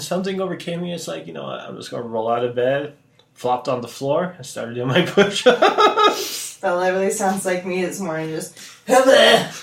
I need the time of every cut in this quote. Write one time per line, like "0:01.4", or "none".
none

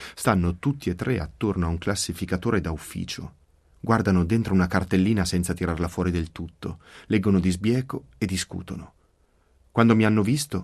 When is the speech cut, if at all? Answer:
none

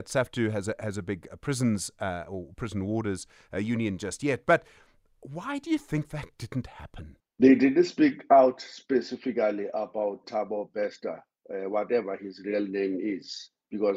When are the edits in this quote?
0:07.2
0:10.2

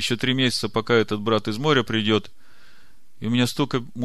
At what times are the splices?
none

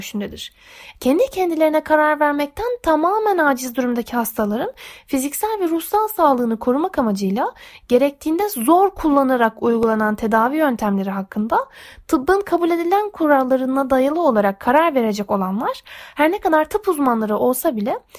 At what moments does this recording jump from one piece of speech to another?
none

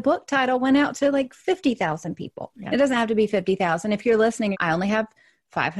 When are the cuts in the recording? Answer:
0:04.5

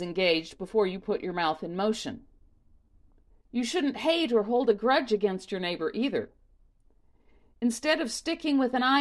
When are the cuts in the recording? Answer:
0:03.3

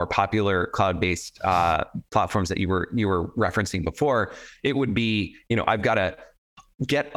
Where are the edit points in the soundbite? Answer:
none

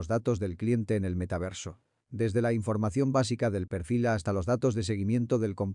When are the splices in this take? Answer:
0:02.0

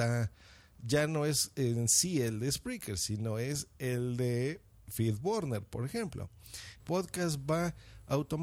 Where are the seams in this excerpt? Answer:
0:06.8

